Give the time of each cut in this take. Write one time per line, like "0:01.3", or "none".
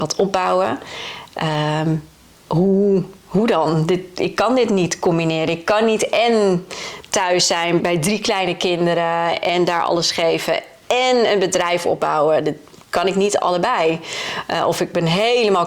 0:07.8